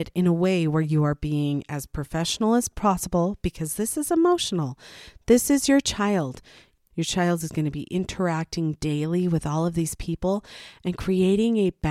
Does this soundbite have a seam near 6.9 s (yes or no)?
yes